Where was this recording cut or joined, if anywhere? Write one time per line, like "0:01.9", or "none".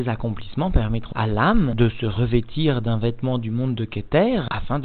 0:01.1